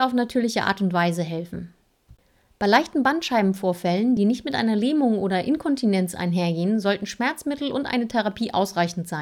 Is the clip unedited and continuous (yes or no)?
yes